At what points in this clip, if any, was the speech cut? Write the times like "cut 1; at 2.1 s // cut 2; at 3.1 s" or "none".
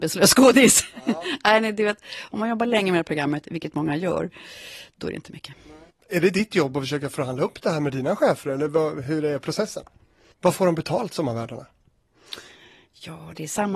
cut 1; at 10.3 s